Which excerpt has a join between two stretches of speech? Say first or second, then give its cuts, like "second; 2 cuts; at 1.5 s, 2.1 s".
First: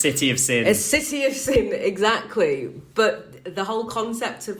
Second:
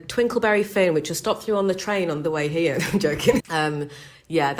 second; 1 cut; at 3.4 s